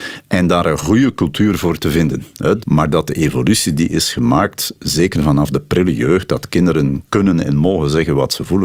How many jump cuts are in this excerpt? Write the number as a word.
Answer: one